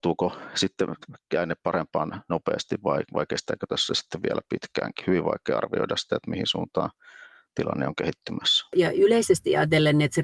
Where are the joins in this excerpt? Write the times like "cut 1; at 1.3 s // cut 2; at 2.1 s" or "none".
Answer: none